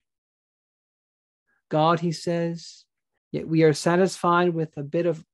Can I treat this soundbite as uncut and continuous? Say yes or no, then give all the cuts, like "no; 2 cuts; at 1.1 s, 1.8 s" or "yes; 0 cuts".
no; 1 cut; at 3.2 s